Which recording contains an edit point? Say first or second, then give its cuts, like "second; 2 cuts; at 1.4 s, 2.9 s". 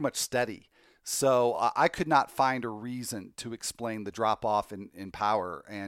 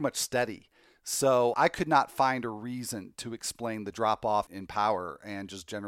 second; 2 cuts; at 1.5 s, 4.5 s